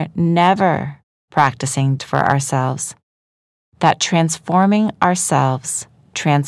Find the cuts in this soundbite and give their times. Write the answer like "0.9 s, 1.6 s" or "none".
2.0 s